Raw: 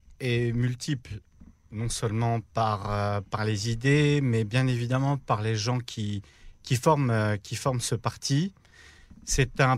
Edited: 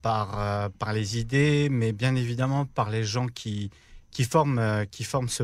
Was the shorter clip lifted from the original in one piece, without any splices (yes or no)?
yes